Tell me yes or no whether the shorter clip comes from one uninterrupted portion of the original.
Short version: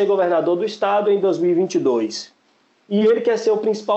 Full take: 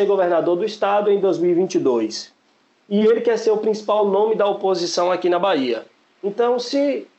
yes